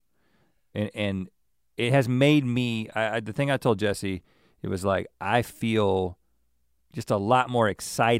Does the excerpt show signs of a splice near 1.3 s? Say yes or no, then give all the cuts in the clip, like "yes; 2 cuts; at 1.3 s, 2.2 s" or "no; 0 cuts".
no; 0 cuts